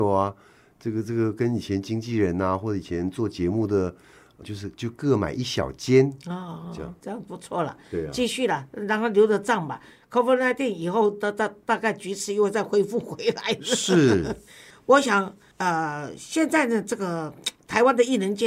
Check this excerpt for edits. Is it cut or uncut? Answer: cut